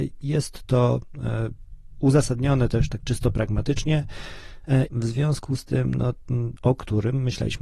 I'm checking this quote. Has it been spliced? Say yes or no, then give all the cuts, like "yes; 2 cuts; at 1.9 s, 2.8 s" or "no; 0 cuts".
yes; 2 cuts; at 4.9 s, 6.6 s